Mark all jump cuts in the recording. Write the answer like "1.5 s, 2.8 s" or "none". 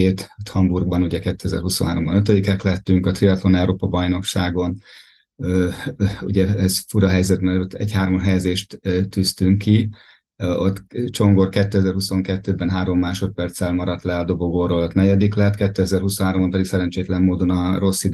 none